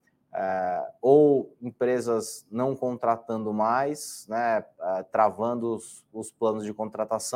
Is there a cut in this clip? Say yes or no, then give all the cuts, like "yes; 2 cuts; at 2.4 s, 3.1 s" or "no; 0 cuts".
no; 0 cuts